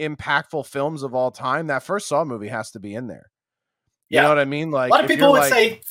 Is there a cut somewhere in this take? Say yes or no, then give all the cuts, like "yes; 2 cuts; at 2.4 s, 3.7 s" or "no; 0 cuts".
no; 0 cuts